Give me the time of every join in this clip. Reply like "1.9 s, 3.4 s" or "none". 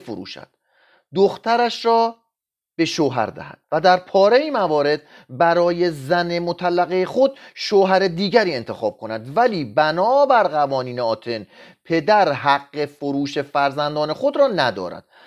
3.6 s